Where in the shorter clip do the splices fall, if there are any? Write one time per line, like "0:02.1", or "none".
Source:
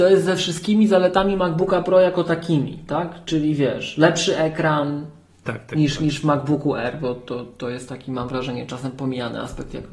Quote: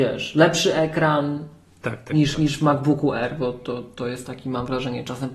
none